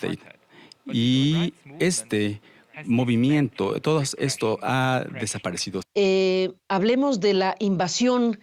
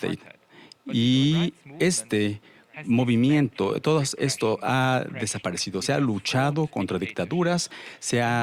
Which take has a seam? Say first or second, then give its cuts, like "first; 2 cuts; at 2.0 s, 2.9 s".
first; 1 cut; at 5.8 s